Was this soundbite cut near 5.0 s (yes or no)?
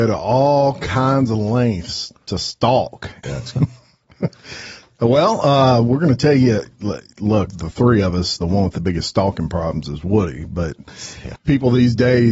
no